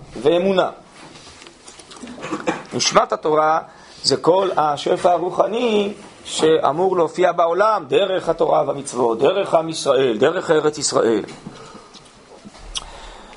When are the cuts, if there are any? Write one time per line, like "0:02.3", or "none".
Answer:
0:02.2